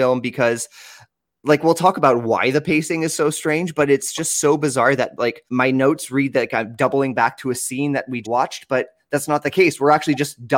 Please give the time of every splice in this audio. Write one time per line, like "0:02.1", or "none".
0:05.5
0:08.2